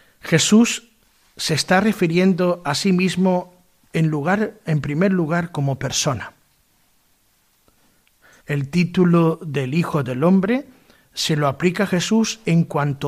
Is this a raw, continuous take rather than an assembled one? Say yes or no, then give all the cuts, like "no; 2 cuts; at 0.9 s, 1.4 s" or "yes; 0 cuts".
no; 1 cut; at 8.4 s